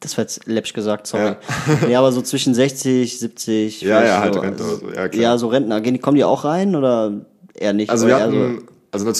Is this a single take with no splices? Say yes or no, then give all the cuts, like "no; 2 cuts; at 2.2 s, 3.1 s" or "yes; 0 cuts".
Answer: yes; 0 cuts